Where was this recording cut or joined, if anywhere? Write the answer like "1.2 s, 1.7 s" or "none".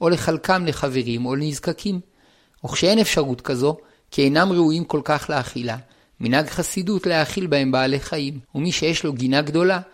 6.1 s, 8.5 s